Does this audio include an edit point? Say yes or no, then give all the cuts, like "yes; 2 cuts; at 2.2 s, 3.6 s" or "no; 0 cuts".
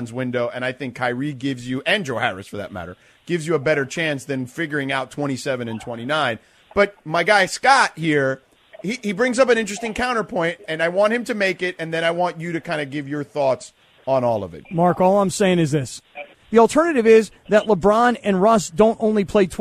yes; 3 cuts; at 14.6 s, 16.3 s, 18.2 s